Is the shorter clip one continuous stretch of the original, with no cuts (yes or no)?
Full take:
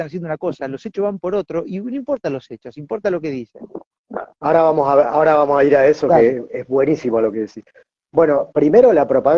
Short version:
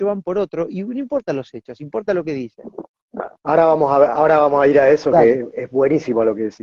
yes